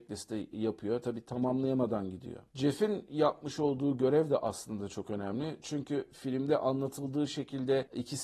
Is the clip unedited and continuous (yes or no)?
yes